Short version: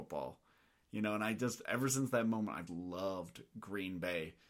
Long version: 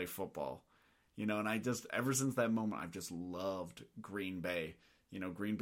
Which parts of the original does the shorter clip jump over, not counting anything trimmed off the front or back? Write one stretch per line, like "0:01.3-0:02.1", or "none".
0:02.9-0:03.1

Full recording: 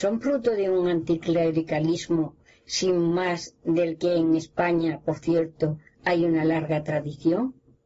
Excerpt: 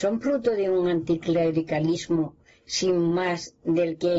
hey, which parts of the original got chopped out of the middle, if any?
none

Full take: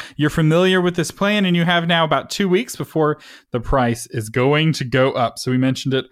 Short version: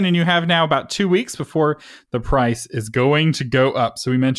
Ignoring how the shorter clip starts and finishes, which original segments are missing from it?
none

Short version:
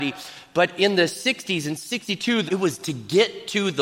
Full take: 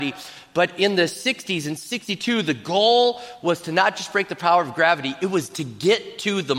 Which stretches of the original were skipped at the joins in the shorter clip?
0:02.5-0:05.2

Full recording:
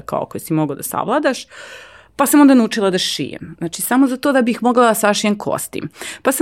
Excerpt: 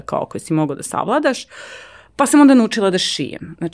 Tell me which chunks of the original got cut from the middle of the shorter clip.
none

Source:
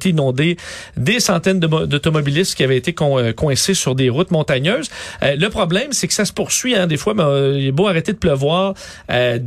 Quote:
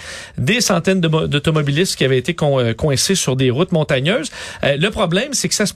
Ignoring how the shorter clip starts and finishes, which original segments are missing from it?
none

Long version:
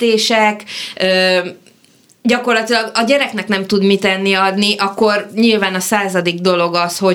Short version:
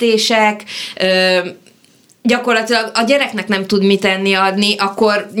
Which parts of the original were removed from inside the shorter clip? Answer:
none

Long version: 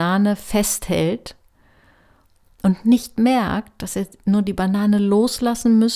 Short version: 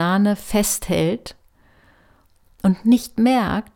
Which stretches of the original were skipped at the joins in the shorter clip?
none

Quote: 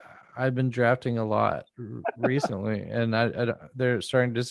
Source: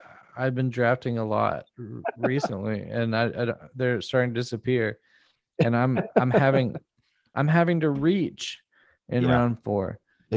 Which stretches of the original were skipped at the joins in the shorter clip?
none

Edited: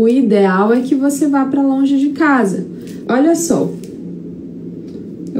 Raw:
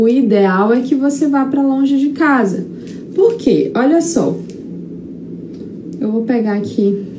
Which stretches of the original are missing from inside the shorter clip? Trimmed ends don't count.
0:03.1-0:03.7

